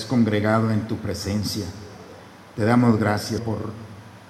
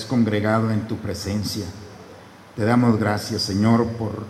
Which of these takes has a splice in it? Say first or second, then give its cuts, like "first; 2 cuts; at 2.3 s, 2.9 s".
first; 1 cut; at 3.4 s